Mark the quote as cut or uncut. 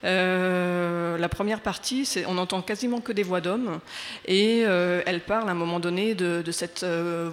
uncut